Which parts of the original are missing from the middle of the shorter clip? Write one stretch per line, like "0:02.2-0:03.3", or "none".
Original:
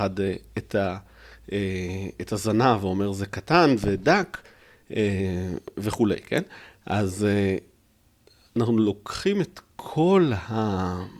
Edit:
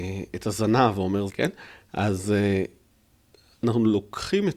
0:03.1-0:06.2